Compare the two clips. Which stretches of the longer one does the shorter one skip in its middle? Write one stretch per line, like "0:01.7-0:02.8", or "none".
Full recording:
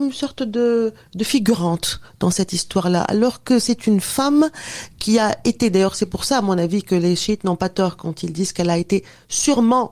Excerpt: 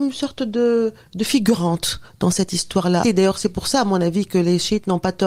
0:03.0-0:05.6